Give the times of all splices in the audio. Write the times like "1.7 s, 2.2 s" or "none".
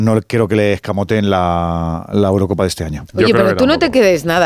none